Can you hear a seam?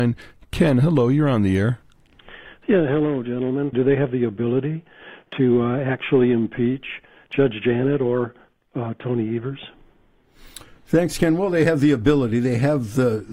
yes; 1 cut; at 3.7 s

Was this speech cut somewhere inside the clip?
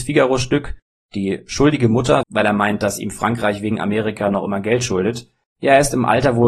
yes; 2 cuts; at 2.2 s, 5.4 s

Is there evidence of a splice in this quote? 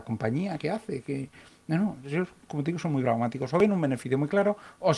no; 0 cuts

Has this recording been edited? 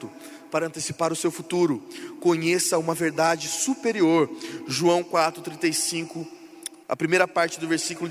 yes; 1 cut; at 6.8 s

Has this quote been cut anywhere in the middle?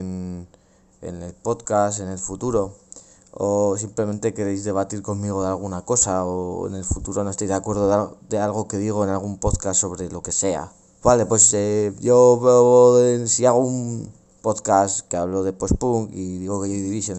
yes; 1 cut; at 11.0 s

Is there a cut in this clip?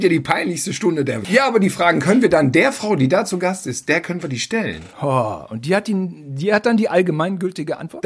yes; 2 cuts; at 1.2 s, 4.9 s

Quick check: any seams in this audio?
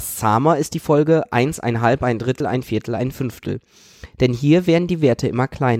no; 0 cuts

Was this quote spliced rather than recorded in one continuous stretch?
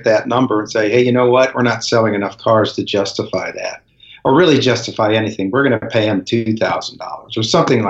no; 0 cuts

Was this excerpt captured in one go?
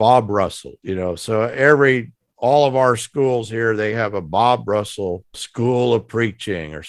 yes; 0 cuts

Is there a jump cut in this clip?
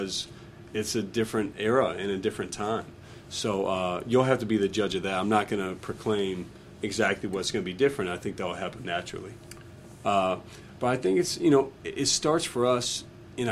yes; 1 cut; at 10.0 s

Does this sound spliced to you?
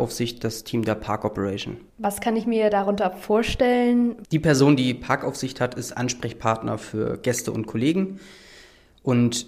yes; 2 cuts; at 1.9 s, 4.2 s

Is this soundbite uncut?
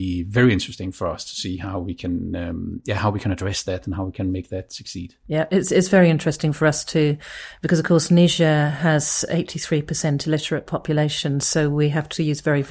yes; 0 cuts

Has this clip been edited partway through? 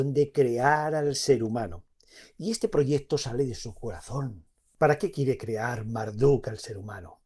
no; 0 cuts

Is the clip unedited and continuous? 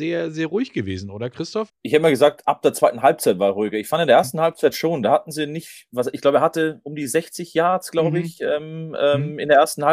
no; 1 cut; at 1.7 s

